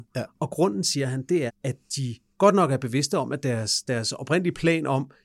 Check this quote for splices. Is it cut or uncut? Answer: cut